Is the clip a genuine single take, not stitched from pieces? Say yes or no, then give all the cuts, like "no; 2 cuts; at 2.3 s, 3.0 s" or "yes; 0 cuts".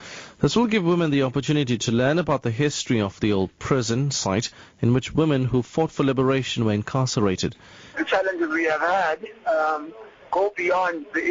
no; 1 cut; at 7.9 s